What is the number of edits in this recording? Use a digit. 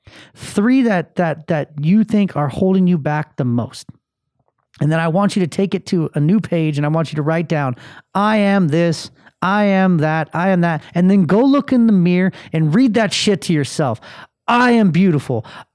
1